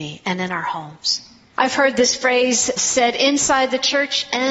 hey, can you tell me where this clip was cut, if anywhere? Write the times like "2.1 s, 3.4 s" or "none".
1.5 s, 2.8 s